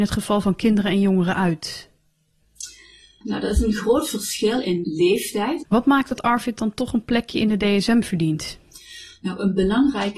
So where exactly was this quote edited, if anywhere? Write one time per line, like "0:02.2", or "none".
0:05.6